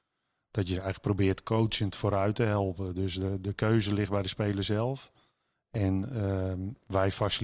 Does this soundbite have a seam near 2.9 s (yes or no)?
no